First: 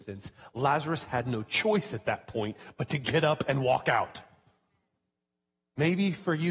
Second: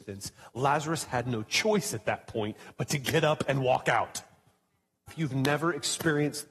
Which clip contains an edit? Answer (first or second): second